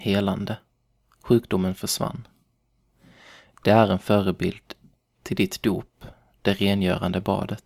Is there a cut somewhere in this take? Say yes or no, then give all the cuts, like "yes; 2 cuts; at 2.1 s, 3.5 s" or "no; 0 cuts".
no; 0 cuts